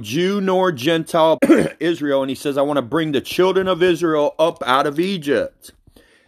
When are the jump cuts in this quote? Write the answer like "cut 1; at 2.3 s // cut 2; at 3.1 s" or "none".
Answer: cut 1; at 1.4 s